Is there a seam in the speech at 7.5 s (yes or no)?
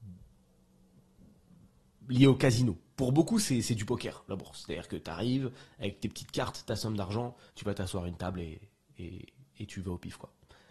yes